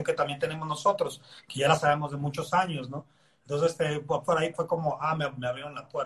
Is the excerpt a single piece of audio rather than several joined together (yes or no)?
no